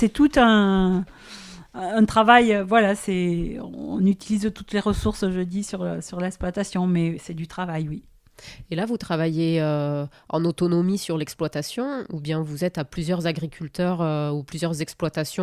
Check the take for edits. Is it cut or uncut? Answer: uncut